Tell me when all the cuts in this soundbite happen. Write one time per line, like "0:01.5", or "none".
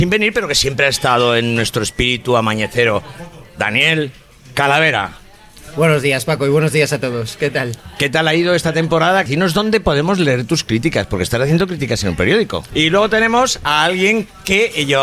0:09.3
0:12.7